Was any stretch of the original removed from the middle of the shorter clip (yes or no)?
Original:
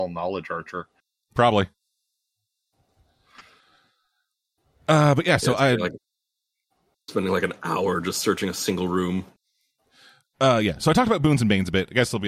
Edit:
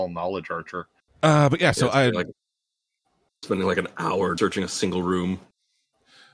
yes